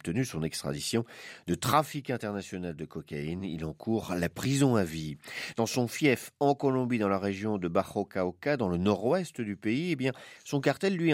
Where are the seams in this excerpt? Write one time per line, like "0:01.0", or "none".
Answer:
none